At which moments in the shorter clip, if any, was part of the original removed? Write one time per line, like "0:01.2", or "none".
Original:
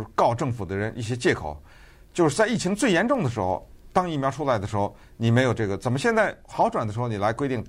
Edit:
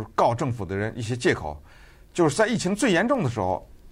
none